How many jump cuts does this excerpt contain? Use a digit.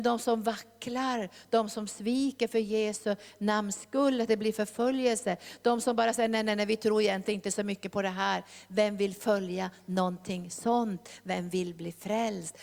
0